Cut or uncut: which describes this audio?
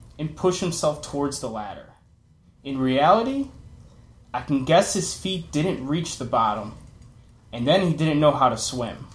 uncut